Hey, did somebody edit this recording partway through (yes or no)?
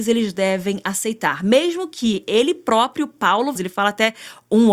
yes